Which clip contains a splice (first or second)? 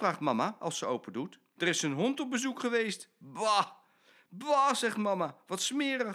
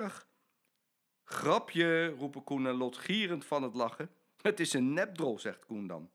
first